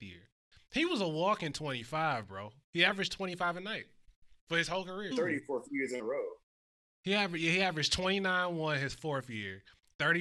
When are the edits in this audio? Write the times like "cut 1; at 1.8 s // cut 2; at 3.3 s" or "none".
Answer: cut 1; at 5.1 s

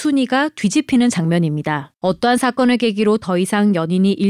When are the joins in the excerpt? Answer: cut 1; at 2.0 s

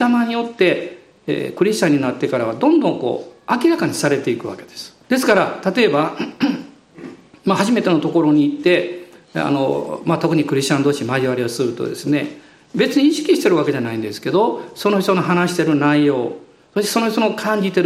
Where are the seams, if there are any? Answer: cut 1; at 5.0 s

